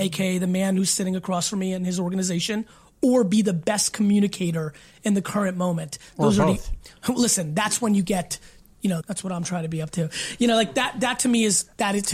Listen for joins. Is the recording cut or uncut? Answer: cut